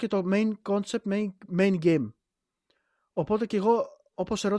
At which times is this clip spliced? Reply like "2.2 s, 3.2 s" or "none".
none